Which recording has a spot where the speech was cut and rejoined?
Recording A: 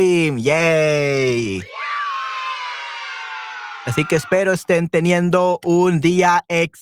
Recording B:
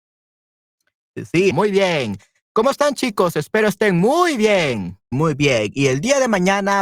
B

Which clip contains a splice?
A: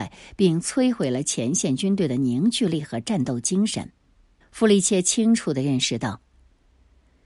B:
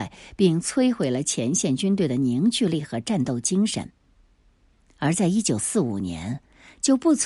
A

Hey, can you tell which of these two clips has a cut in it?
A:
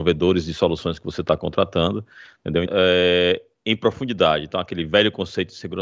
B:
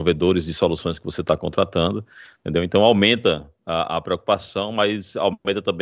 A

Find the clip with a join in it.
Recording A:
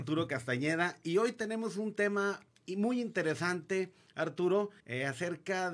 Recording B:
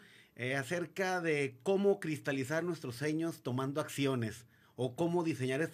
A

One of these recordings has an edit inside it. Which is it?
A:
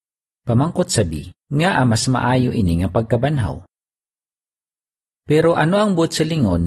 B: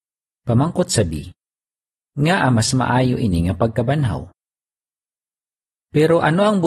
A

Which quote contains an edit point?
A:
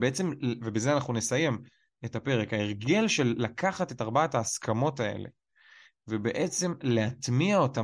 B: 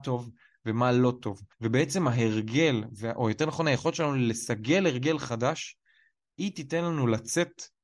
B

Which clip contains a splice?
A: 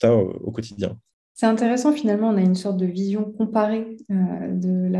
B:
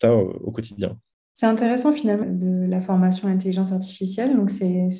B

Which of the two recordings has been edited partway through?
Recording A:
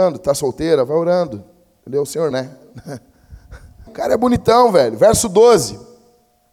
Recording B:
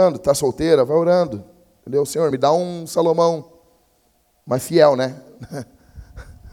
A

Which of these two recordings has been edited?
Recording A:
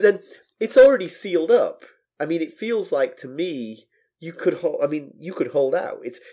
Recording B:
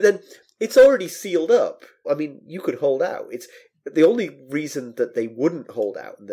B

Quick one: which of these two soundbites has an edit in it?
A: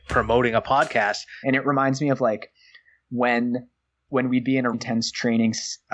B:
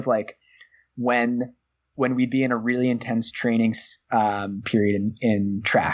A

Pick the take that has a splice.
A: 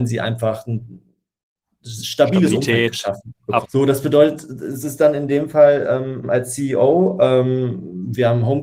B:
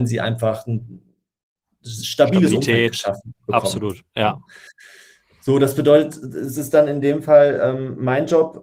A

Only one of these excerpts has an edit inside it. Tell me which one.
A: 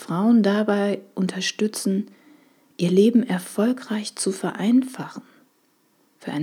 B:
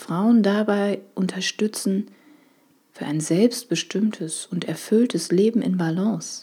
B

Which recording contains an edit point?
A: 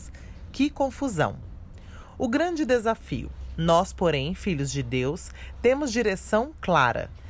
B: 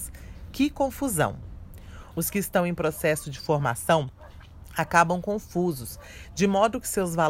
B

